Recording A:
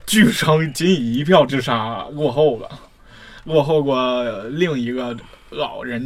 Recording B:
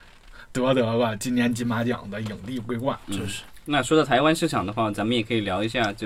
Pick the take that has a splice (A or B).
B